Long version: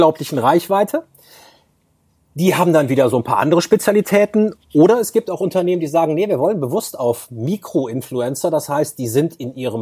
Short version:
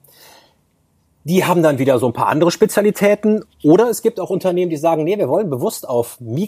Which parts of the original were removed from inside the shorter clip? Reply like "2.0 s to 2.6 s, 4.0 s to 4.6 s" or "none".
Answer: none